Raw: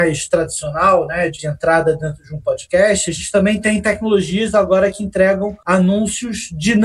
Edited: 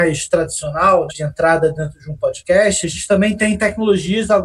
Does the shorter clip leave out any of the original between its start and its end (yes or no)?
yes